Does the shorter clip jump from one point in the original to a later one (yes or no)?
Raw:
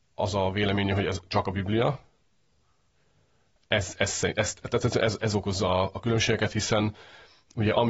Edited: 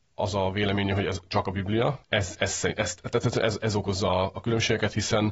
yes